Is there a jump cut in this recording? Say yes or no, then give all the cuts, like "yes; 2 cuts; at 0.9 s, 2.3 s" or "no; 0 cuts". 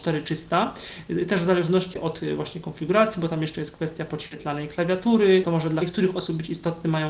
yes; 1 cut; at 1.9 s